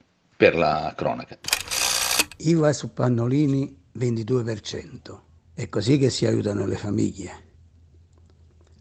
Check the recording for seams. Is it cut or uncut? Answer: cut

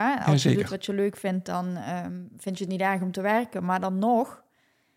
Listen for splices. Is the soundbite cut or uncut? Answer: uncut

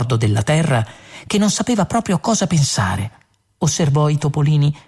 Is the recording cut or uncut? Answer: uncut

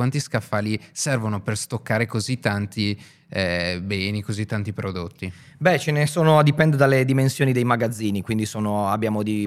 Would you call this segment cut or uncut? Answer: uncut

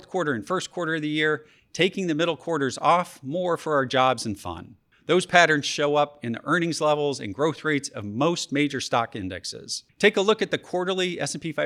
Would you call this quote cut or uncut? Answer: uncut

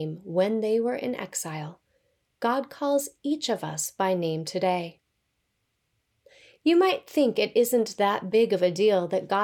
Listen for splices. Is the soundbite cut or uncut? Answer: uncut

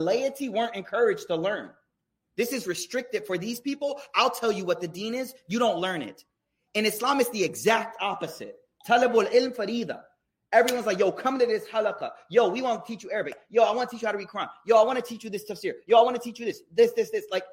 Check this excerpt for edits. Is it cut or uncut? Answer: uncut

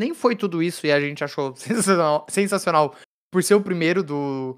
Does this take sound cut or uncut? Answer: uncut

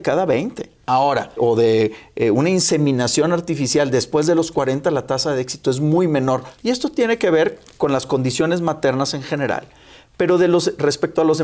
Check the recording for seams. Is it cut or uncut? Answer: cut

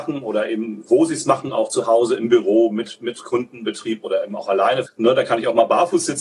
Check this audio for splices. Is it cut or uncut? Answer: cut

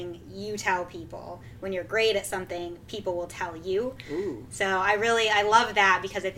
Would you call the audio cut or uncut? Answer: uncut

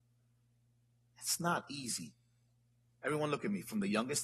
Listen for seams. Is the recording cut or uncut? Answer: cut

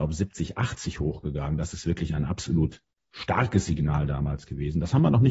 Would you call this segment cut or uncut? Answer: uncut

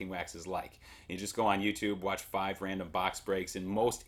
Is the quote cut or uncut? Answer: uncut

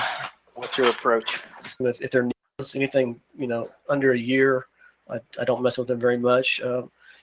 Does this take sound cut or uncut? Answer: cut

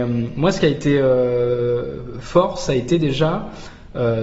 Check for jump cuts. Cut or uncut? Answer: uncut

